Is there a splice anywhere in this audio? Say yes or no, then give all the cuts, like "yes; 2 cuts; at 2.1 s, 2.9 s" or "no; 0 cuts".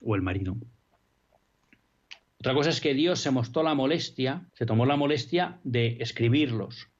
yes; 2 cuts; at 2.2 s, 4.5 s